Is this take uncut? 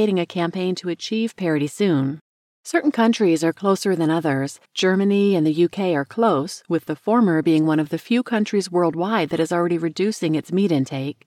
no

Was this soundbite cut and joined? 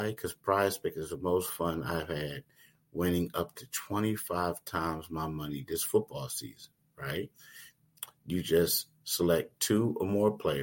no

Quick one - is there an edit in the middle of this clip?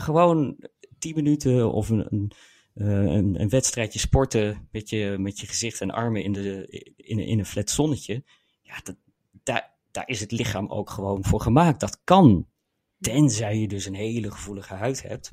no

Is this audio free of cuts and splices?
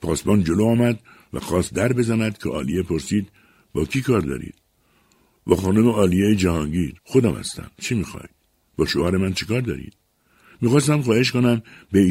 no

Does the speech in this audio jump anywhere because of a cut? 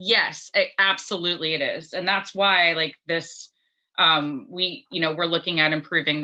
no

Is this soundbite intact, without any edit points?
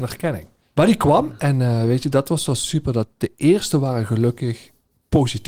yes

